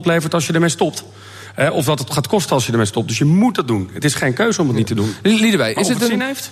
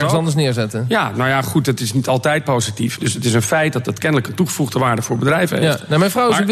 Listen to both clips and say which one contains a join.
second; 1 cut; at 3.0 s

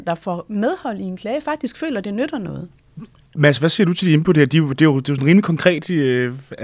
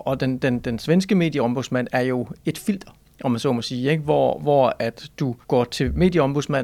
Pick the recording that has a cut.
second; 1 cut; at 5.4 s

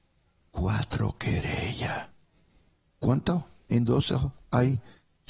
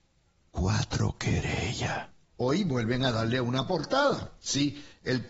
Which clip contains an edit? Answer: second; 1 cut; at 2.3 s

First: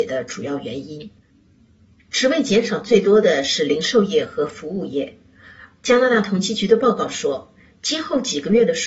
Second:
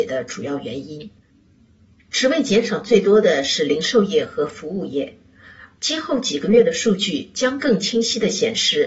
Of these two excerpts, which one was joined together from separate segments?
second; 1 cut; at 5.8 s

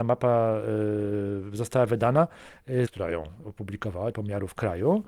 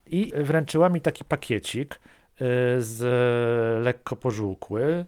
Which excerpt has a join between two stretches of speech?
first; 2 cuts; at 2.9 s, 4.1 s

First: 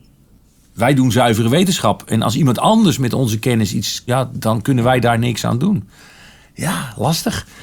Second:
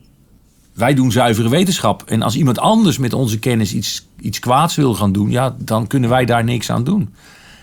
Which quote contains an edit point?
first; 1 cut; at 4.1 s

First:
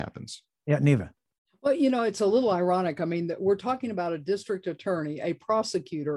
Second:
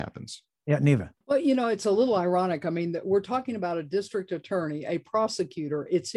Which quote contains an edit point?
second; 1 cut; at 1.2 s

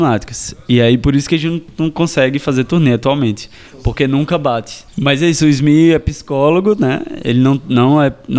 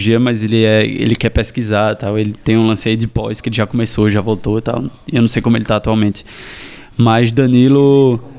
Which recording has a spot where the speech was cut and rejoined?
first; 1 cut; at 4.9 s

